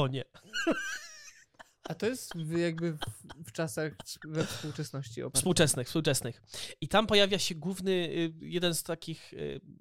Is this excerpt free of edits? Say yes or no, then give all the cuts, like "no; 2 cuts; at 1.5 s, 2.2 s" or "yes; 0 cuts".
yes; 0 cuts